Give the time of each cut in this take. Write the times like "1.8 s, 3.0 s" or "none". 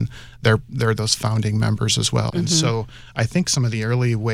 2.3 s